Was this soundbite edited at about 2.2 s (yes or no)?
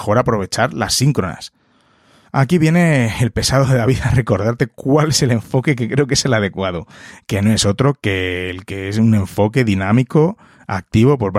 yes